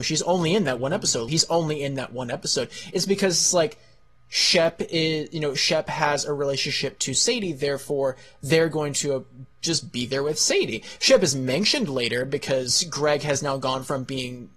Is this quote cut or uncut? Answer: cut